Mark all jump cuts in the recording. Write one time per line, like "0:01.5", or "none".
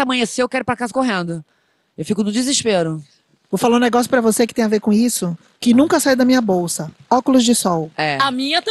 none